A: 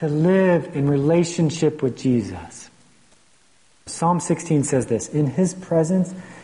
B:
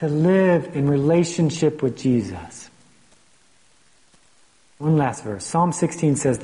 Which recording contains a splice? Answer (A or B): A